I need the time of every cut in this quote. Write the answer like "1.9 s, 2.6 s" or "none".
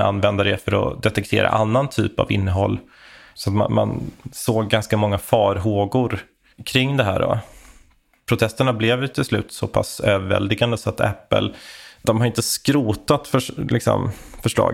none